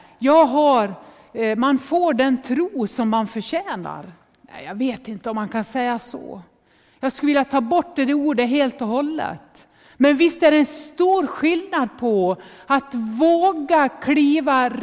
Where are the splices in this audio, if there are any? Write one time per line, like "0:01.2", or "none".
none